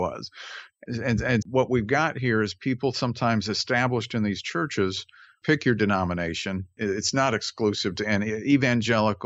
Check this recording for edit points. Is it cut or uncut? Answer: cut